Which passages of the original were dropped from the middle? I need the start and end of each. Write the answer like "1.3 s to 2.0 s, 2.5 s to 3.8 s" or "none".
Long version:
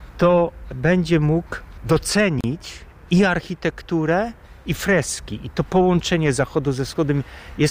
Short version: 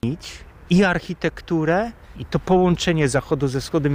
4.6 s to 5.4 s